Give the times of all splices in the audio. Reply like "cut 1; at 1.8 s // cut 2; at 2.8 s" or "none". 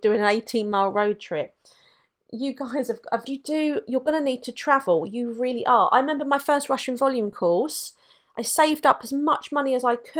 cut 1; at 3.3 s